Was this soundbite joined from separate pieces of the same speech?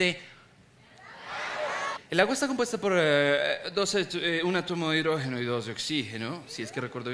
yes; 1 cut; at 2.0 s

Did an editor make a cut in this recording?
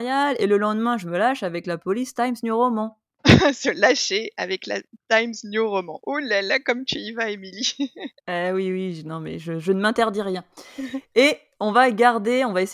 no; 0 cuts

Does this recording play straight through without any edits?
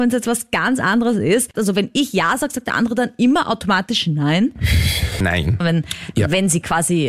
no; 2 cuts; at 1.5 s, 5.6 s

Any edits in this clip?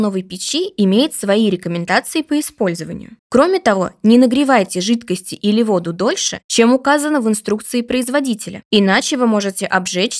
yes; 1 cut; at 3.2 s

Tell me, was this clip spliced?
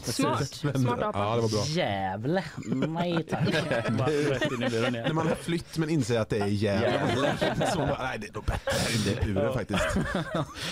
no; 0 cuts

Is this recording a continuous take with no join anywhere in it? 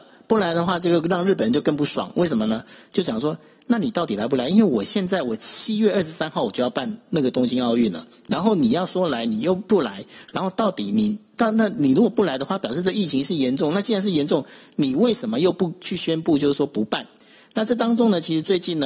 yes; 0 cuts

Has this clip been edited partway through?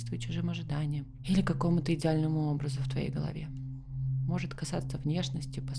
no; 0 cuts

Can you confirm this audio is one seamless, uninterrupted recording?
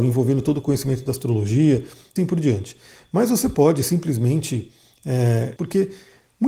no; 2 cuts; at 2.2 s, 5.6 s

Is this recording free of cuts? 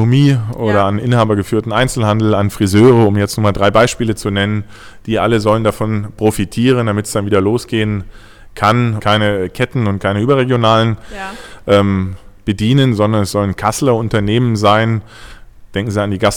no; 1 cut; at 9.0 s

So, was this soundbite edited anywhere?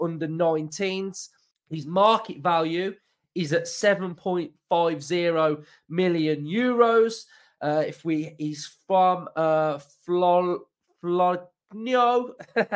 yes; 1 cut; at 1.5 s

